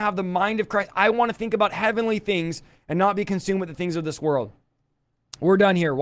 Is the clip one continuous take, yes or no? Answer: yes